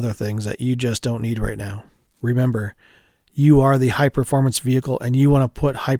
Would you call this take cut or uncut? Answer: uncut